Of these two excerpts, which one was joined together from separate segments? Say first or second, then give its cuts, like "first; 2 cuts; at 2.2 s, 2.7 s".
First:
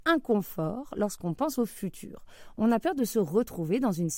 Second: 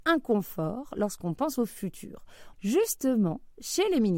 second; 1 cut; at 2.5 s